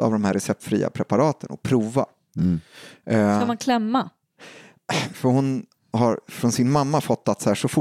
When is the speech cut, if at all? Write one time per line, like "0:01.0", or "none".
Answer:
0:05.1